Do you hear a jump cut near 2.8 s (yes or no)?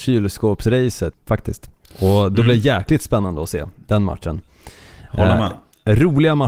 no